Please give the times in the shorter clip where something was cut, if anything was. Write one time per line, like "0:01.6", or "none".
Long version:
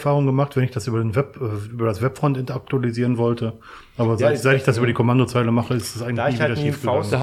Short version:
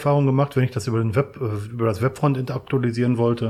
none